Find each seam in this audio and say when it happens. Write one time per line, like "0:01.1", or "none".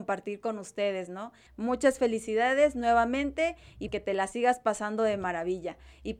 0:01.5
0:03.9